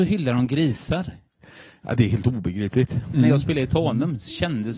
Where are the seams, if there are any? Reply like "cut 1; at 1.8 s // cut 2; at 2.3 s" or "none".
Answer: cut 1; at 3.1 s